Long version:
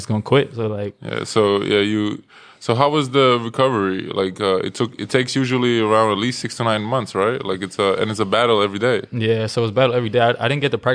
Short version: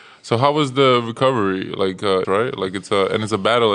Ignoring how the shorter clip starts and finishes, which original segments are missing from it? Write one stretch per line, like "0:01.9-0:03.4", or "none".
0:04.6-0:07.1